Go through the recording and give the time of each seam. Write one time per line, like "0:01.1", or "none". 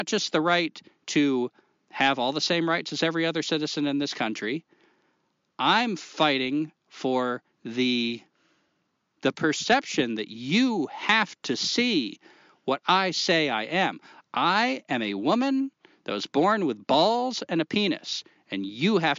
0:09.2